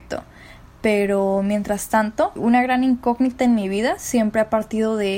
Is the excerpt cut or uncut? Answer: cut